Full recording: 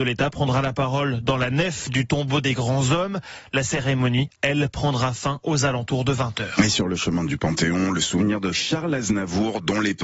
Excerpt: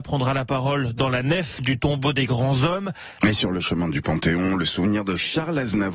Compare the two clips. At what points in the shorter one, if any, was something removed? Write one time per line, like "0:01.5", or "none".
0:03.2